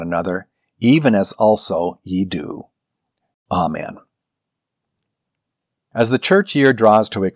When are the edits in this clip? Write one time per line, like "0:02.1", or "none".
none